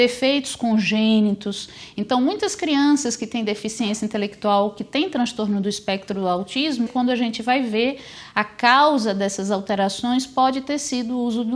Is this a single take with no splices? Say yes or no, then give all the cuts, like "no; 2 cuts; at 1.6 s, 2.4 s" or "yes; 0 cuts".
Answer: no; 1 cut; at 6.9 s